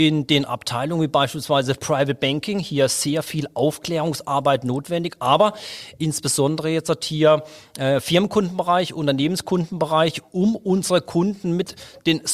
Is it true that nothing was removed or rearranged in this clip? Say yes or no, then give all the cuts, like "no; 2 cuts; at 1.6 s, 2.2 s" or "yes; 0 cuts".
yes; 0 cuts